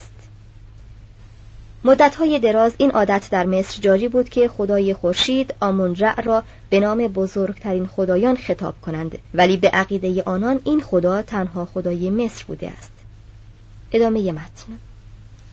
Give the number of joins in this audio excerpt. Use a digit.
1